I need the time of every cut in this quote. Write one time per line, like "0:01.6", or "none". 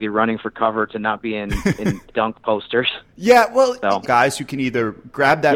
0:02.1
0:04.0